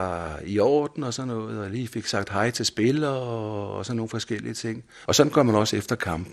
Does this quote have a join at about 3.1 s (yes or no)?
no